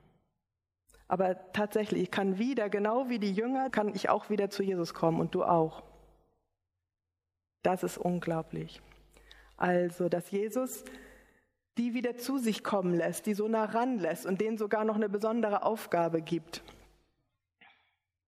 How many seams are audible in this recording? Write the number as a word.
one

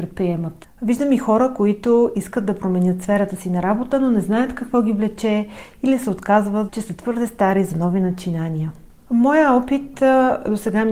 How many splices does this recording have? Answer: one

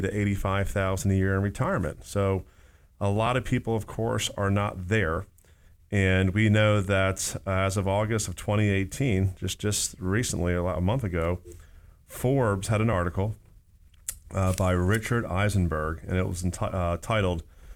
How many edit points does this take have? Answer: zero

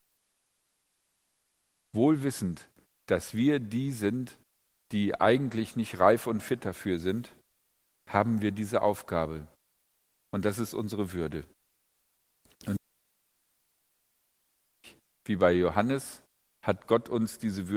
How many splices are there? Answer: zero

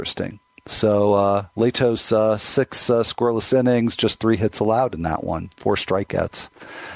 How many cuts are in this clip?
one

